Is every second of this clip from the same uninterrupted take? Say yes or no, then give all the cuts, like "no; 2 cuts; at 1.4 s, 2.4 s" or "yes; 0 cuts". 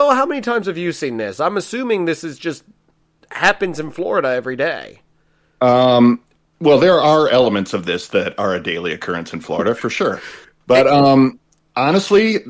yes; 0 cuts